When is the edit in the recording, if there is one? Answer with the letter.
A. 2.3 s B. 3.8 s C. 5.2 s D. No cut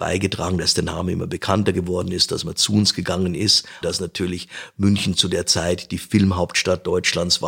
B